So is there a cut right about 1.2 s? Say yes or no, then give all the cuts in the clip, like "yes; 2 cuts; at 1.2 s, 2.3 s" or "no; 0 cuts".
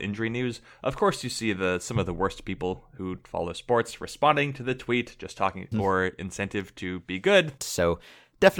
no; 2 cuts; at 5.7 s, 7.6 s